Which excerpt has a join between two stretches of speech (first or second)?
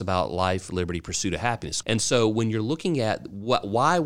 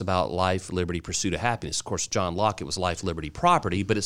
first